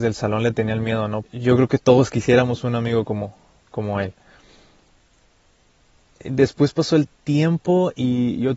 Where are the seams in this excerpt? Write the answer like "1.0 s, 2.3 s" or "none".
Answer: 1.2 s